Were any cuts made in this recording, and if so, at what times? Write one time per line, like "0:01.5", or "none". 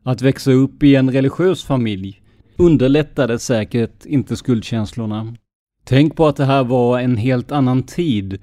0:02.4
0:05.6